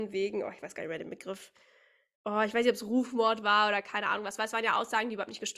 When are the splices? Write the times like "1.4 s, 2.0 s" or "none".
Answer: none